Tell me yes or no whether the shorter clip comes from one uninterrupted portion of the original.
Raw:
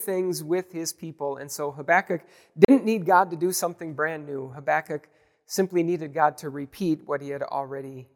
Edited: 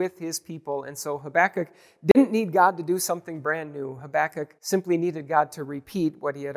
no